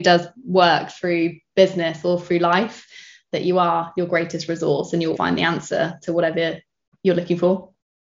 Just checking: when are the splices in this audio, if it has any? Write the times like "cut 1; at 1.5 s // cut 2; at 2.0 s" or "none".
cut 1; at 5.1 s